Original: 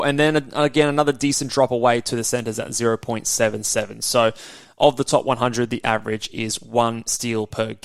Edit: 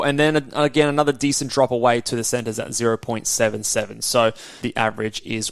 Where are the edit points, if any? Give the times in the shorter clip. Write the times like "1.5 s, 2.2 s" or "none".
4.6 s